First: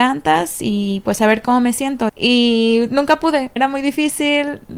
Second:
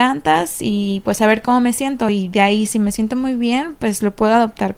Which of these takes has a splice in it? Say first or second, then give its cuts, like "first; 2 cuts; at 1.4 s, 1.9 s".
first; 2 cuts; at 2.1 s, 3.6 s